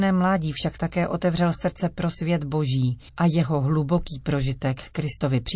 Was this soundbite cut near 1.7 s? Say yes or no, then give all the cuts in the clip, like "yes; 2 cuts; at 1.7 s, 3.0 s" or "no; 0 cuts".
no; 1 cut; at 3.1 s